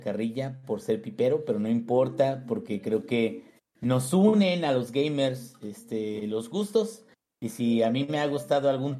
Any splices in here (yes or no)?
no